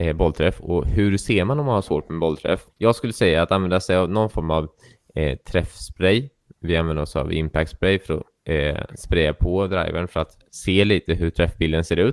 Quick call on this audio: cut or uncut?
cut